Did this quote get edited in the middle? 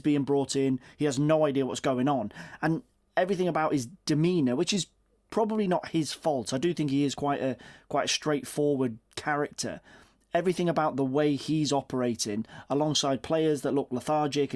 no; 0 cuts

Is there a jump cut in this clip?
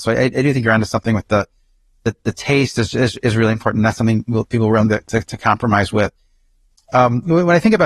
no; 0 cuts

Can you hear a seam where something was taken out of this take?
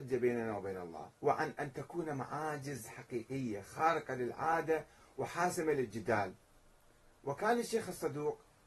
yes; 1 cut; at 1.2 s

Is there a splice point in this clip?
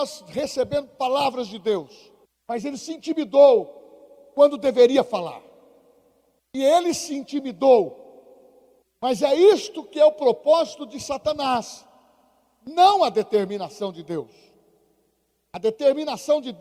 yes; 3 cuts; at 2.2 s, 6.4 s, 8.8 s

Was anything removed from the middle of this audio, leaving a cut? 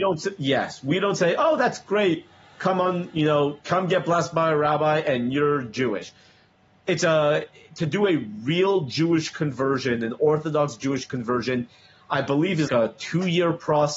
yes; 2 cuts; at 3.6 s, 12.7 s

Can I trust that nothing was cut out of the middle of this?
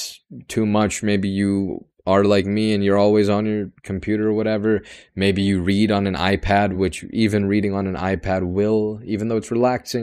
yes; 0 cuts

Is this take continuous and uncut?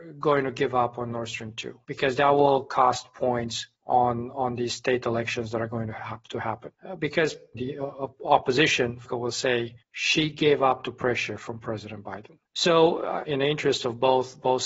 no; 2 cuts; at 3.7 s, 13.3 s

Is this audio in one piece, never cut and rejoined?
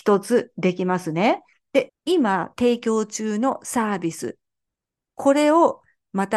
no; 1 cut; at 1.9 s

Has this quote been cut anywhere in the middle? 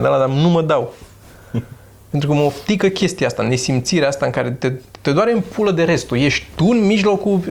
no; 0 cuts

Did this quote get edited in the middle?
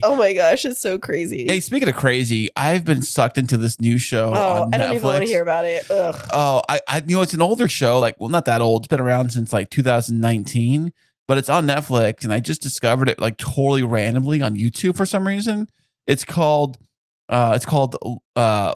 no; 0 cuts

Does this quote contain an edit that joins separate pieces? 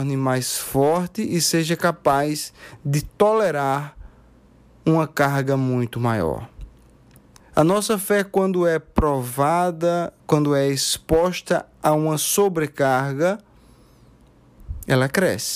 yes; 2 cuts; at 7.4 s, 10.2 s

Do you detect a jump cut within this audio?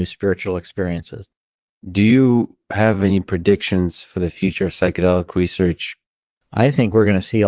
yes; 1 cut; at 1.7 s

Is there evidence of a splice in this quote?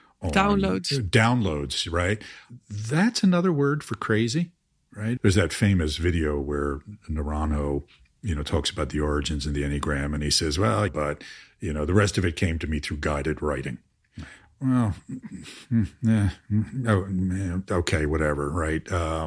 yes; 2 cuts; at 5.2 s, 10.9 s

